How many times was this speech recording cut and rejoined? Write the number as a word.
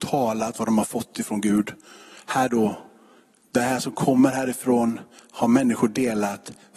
zero